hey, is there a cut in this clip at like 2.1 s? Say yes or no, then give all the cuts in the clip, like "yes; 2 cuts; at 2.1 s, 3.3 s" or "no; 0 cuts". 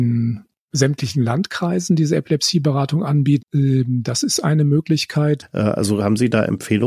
no; 2 cuts; at 3.4 s, 5.4 s